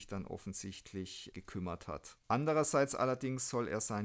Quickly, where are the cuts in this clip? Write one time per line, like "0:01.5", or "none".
0:02.2